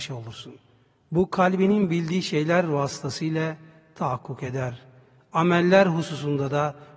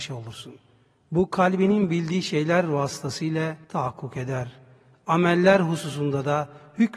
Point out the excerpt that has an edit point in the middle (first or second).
second